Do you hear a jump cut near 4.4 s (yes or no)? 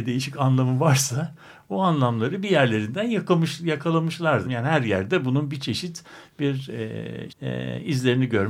yes